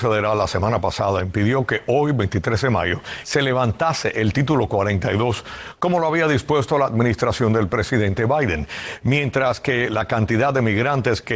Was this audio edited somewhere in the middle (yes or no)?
no